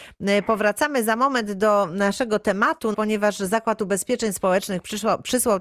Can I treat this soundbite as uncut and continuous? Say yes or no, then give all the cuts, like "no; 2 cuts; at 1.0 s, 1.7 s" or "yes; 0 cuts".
no; 1 cut; at 2.9 s